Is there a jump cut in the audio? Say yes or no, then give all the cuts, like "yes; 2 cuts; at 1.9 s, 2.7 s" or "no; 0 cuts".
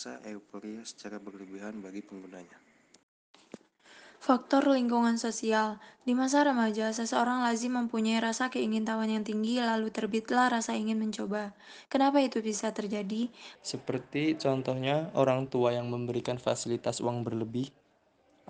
yes; 2 cuts; at 11.9 s, 13.6 s